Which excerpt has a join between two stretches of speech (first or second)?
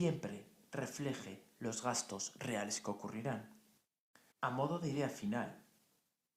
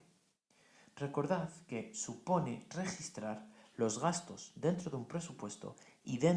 first